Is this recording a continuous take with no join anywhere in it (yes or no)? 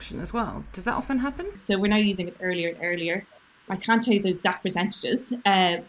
no